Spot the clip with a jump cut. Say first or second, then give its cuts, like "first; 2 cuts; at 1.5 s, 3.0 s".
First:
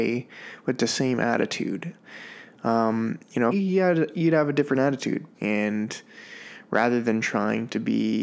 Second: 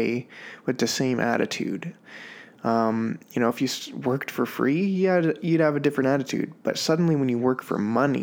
first; 2 cuts; at 3.5 s, 5.3 s